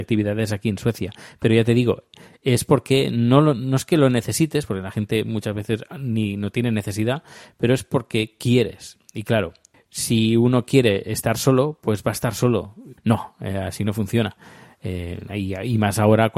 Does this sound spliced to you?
yes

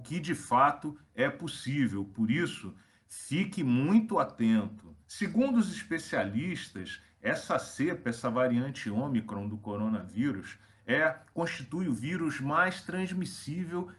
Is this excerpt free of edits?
no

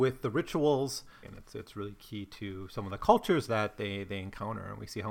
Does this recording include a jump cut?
yes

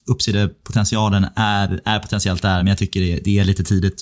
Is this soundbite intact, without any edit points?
yes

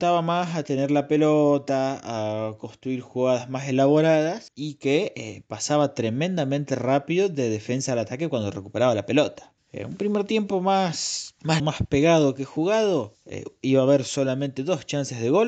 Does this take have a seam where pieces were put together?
yes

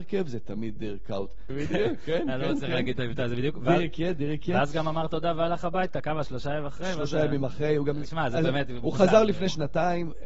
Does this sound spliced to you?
yes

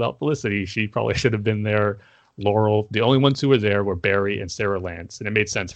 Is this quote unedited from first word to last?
yes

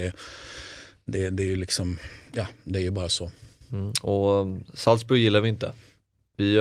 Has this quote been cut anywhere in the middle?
no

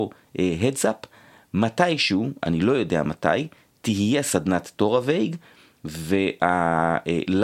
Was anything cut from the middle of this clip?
no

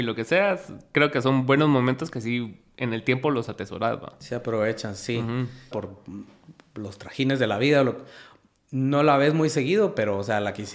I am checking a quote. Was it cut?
yes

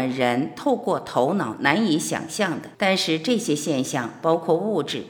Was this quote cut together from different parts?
yes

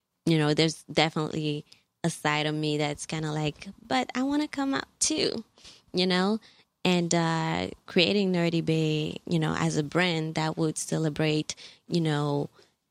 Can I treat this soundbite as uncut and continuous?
no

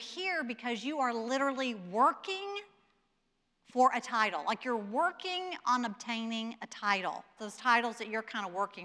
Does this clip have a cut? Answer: yes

